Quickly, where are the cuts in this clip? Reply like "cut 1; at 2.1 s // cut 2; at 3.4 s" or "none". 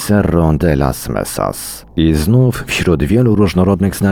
cut 1; at 1.9 s